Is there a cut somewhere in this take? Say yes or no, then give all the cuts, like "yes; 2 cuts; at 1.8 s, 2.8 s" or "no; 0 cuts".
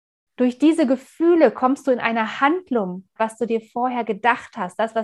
yes; 1 cut; at 3.2 s